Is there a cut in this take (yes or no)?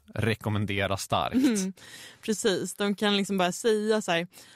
no